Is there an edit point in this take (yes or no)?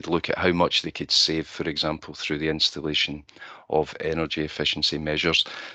no